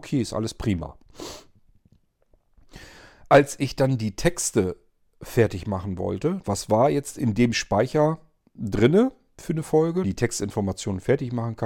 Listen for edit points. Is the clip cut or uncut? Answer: cut